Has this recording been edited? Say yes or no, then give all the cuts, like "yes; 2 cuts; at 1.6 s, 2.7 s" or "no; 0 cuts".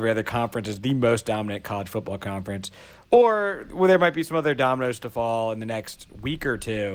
no; 0 cuts